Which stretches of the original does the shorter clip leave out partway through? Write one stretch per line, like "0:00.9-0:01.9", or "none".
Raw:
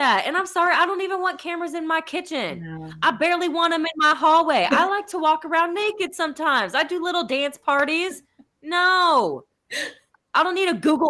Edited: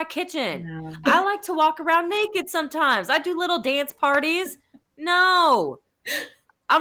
0:03.0-0:04.7